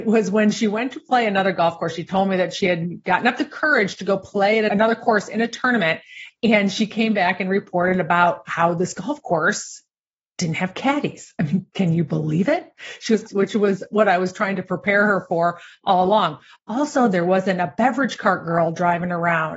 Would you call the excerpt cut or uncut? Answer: cut